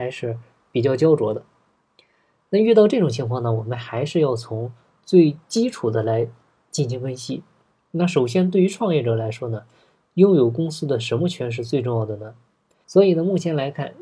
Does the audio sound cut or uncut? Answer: cut